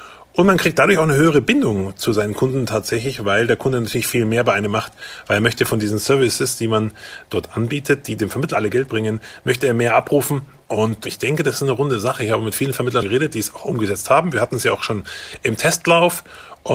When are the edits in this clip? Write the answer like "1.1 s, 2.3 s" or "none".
13.0 s